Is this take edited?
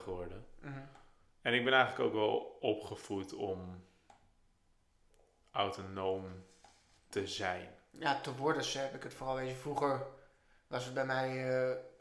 no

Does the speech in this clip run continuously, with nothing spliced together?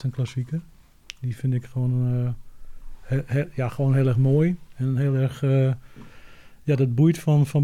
yes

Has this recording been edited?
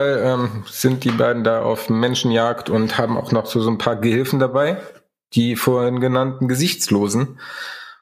no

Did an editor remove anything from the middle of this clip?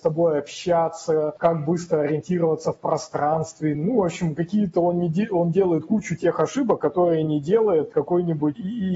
no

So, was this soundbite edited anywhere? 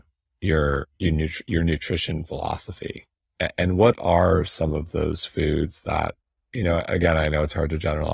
no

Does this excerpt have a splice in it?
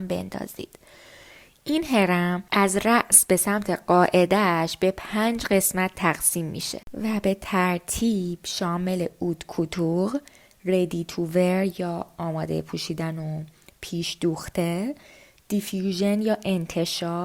yes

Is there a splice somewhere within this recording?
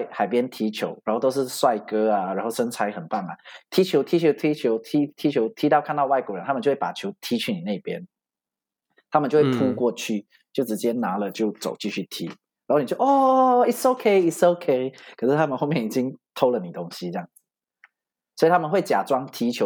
no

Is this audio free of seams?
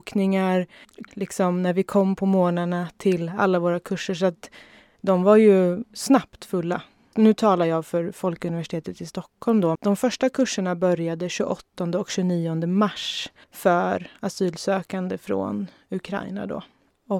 no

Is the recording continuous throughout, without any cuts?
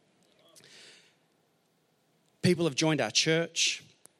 yes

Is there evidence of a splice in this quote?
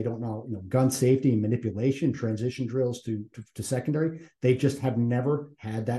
no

